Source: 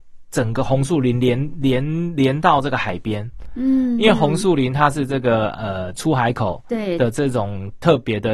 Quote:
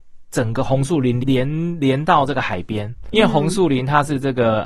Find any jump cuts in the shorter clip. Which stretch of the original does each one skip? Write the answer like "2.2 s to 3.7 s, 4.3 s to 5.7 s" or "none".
1.2 s to 1.6 s, 3.5 s to 4.0 s

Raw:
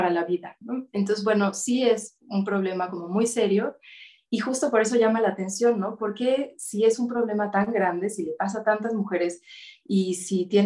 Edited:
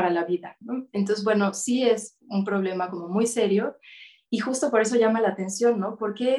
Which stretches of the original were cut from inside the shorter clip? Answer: none

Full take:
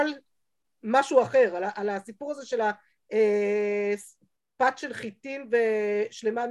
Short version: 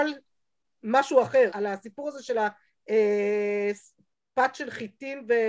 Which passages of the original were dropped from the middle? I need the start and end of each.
1.5 s to 1.7 s

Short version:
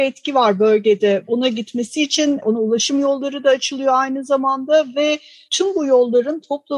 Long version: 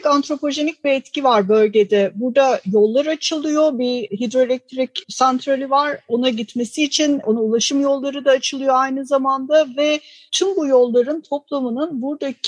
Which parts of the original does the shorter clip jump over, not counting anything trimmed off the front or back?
2.1 s to 6.0 s

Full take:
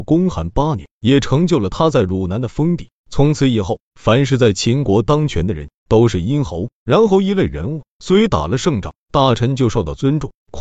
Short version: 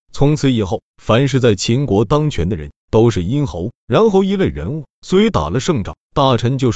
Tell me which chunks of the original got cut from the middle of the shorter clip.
none

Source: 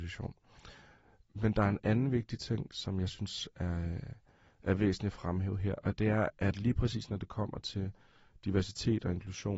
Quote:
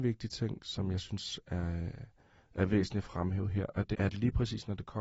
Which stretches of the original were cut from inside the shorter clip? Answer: 6.0 s to 6.3 s

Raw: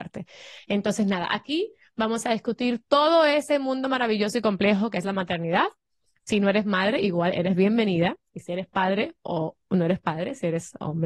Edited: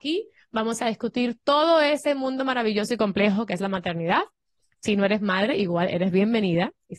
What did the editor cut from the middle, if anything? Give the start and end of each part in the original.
none

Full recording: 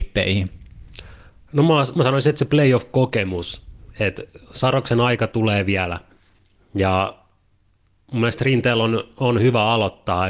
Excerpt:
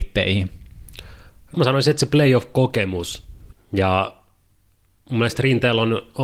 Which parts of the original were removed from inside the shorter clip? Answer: 1.5 s to 1.9 s, 3.9 s to 6.5 s

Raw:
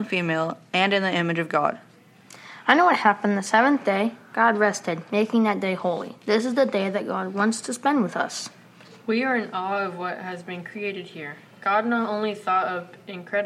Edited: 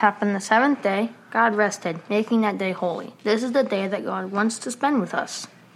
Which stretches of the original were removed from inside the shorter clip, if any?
none

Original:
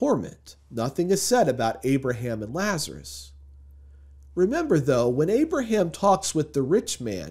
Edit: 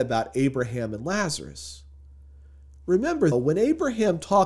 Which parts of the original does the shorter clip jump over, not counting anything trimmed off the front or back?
4.8 s to 5.0 s

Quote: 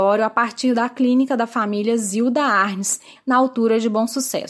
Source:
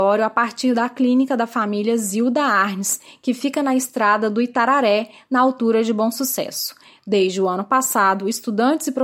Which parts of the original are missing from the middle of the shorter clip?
3.2 s to 5.2 s

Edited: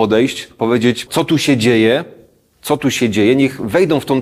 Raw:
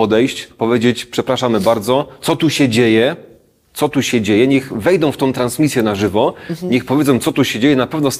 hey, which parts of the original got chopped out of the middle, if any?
1.1 s to 2.2 s

